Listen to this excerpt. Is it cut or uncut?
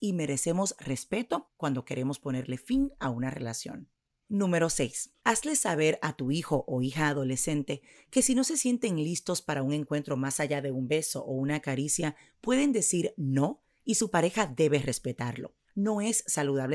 cut